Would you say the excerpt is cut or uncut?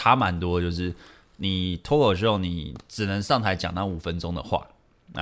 uncut